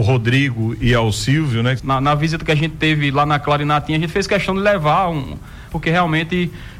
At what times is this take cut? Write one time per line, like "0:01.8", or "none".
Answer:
0:01.8
0:05.7